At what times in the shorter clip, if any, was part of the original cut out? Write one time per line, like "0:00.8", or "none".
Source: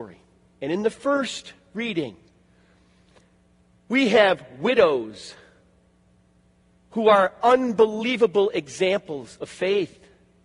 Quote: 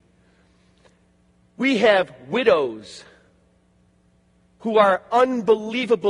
none